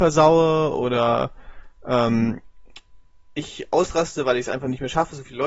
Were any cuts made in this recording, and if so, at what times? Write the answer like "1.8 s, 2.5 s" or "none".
none